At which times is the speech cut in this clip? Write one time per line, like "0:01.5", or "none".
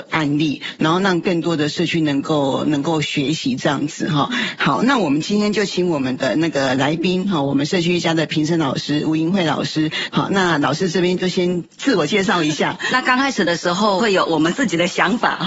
0:10.1
0:12.9
0:14.0

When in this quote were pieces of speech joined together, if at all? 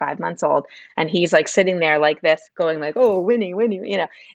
0:02.4

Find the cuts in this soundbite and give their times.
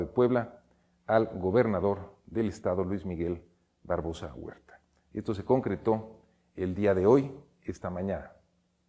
none

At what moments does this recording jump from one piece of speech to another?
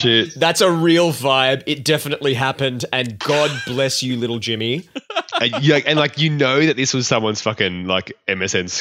none

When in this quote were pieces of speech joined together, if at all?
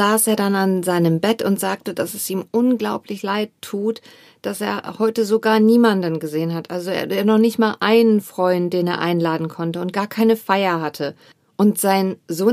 none

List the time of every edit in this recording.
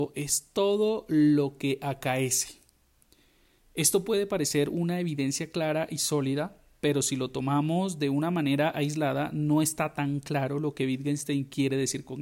none

